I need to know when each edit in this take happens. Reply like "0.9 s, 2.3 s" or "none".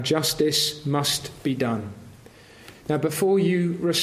2.7 s